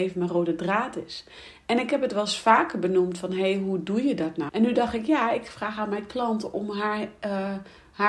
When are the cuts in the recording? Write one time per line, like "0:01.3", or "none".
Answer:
0:04.5